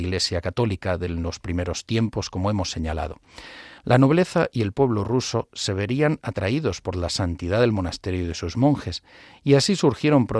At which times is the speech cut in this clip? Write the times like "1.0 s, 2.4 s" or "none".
3.8 s